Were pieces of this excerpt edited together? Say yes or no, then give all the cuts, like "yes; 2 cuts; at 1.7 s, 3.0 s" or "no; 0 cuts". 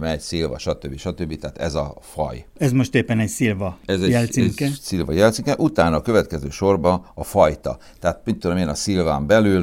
no; 0 cuts